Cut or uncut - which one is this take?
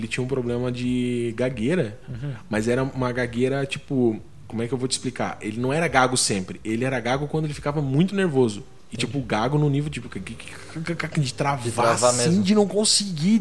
uncut